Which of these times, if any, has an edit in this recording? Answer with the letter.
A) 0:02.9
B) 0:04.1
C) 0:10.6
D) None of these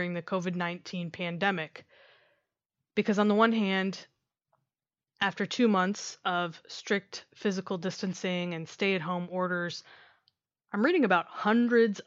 D